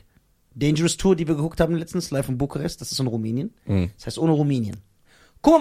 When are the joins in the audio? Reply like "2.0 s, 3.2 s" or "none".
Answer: none